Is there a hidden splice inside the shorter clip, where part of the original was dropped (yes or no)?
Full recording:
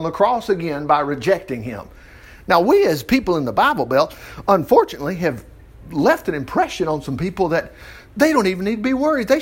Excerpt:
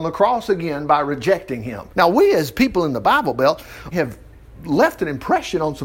yes